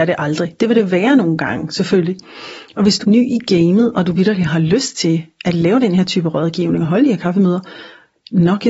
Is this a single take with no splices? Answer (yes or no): no